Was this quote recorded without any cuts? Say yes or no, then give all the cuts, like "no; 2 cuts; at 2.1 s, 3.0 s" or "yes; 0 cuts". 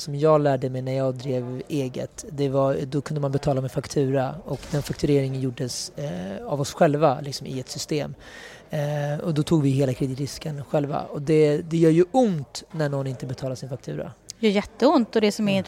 yes; 0 cuts